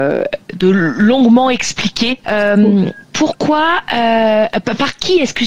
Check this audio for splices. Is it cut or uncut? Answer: cut